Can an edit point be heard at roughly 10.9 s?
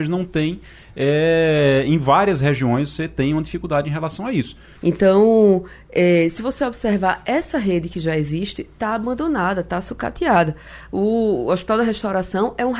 no; 1 cut; at 4.8 s

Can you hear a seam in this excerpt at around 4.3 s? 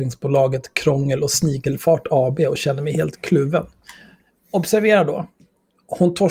no; 0 cuts

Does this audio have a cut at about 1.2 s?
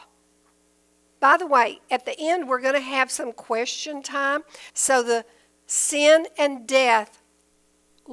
yes; 2 cuts; at 1.2 s, 4.7 s

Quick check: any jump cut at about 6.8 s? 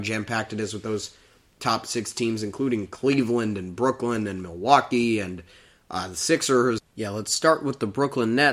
yes; 1 cut; at 6.8 s

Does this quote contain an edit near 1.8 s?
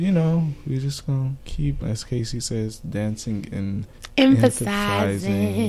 yes; 1 cut; at 1.8 s

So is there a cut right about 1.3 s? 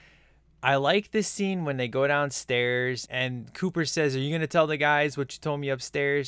no; 1 cut; at 3.0 s

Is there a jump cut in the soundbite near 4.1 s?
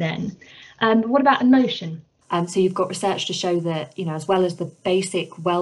no; 1 cut; at 2.2 s

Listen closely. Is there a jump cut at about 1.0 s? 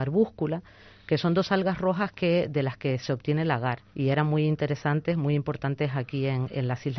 no; 1 cut; at 3.9 s

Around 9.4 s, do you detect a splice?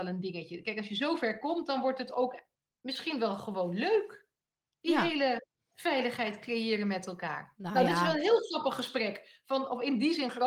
no; 0 cuts

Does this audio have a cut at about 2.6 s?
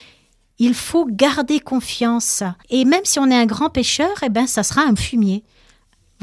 yes; 2 cuts; at 2.6 s, 5.0 s

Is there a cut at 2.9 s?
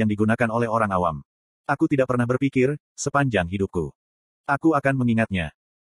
yes; 2 cuts; at 2.9 s, 4.3 s

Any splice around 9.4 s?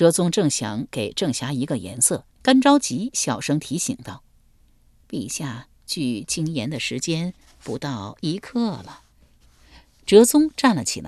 no; 1 cut; at 2.3 s

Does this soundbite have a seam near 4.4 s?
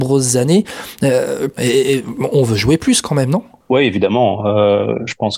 no; 1 cut; at 1.6 s

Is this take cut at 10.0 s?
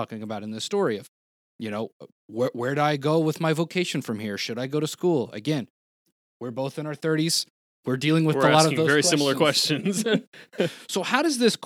no; 0 cuts

